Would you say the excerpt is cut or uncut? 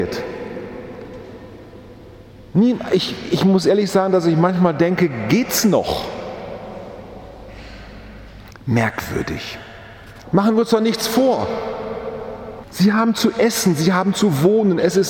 cut